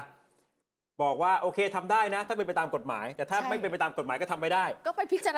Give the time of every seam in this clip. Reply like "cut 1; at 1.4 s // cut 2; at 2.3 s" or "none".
none